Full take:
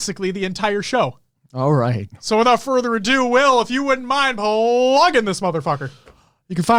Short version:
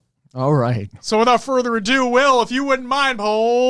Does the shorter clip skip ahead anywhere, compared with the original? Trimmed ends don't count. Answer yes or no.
no